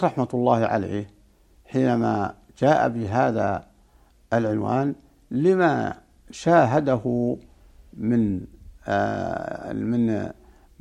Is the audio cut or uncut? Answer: uncut